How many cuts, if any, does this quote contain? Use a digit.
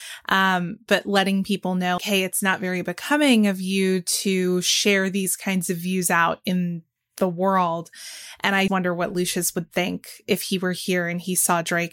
2